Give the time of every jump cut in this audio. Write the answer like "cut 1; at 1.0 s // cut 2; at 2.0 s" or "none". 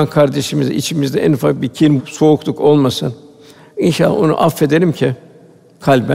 cut 1; at 2.0 s